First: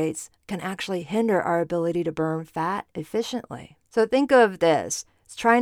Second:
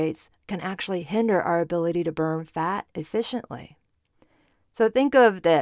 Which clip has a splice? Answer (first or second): first